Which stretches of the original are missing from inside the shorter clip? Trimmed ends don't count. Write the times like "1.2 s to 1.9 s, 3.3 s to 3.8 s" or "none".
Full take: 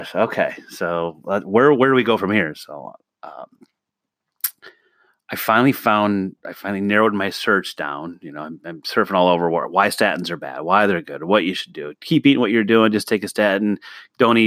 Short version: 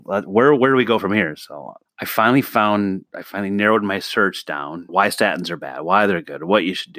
3.0 s to 5.2 s, 8.2 s to 9.7 s